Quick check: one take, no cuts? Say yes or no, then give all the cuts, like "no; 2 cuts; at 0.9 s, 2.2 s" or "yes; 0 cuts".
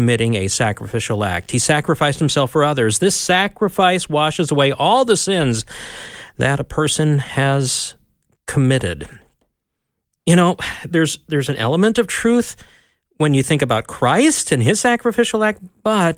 yes; 0 cuts